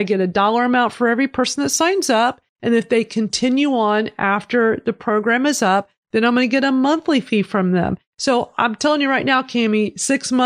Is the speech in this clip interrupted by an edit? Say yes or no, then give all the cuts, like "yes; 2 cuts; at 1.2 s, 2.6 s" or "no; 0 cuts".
no; 0 cuts